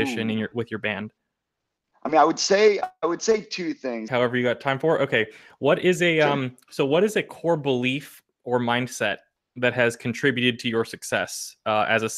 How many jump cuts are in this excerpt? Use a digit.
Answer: 1